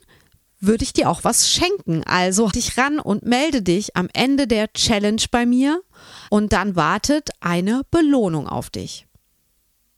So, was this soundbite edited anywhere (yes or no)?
yes